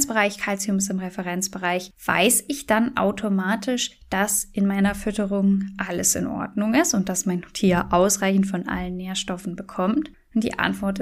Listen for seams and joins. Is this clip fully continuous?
yes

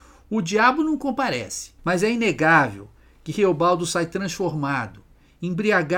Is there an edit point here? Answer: yes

